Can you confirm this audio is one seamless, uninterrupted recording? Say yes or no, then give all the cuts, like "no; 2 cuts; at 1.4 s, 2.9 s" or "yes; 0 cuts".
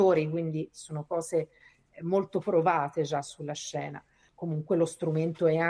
no; 1 cut; at 4.3 s